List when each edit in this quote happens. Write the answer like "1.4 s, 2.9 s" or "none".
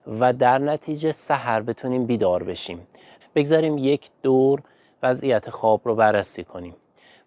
3.2 s